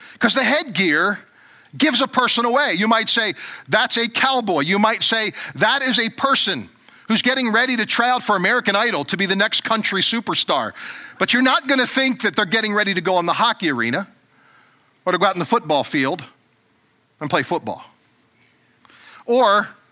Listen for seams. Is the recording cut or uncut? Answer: uncut